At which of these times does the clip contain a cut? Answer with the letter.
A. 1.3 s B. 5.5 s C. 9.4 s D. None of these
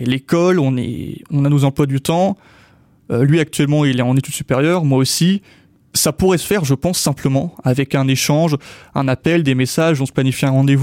D